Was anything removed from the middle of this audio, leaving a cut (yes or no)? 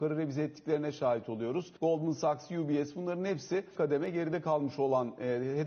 yes